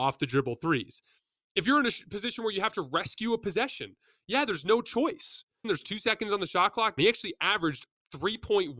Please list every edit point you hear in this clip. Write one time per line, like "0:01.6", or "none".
0:05.6
0:07.0